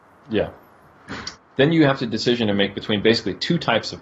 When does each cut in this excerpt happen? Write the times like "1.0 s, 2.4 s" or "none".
1.3 s